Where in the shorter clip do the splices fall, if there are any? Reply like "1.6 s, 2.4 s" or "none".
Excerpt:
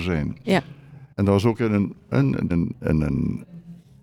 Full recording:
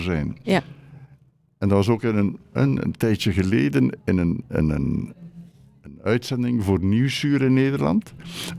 1.1 s, 2.5 s